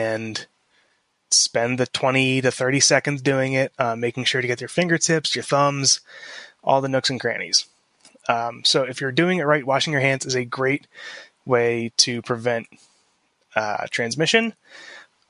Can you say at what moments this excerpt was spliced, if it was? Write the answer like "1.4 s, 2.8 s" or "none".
none